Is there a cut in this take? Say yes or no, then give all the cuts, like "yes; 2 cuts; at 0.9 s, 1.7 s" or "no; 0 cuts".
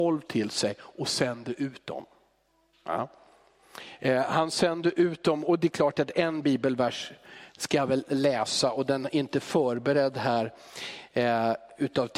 no; 0 cuts